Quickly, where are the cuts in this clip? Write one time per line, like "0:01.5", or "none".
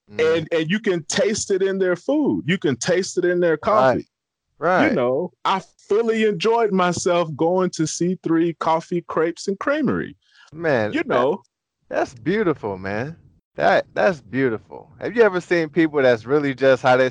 none